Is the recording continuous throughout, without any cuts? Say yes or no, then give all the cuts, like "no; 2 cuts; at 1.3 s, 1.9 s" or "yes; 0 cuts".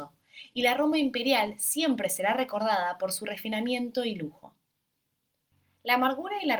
yes; 0 cuts